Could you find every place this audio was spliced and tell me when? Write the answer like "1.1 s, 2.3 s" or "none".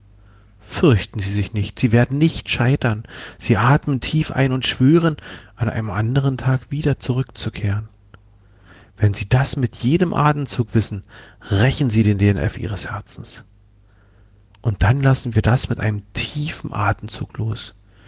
none